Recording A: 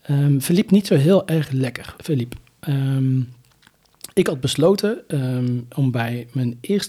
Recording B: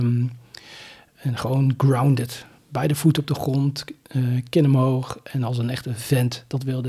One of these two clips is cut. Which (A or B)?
A